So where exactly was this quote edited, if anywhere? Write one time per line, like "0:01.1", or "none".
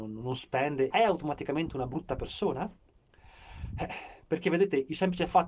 0:00.9